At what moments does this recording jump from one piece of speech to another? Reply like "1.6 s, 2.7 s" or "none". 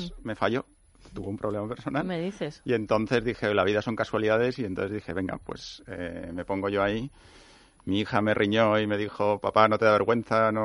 none